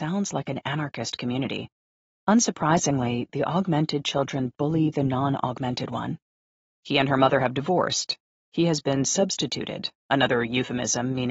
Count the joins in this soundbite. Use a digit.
3